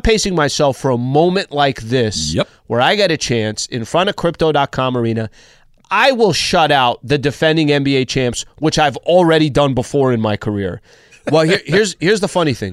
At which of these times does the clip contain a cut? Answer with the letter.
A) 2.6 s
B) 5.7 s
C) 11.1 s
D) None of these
C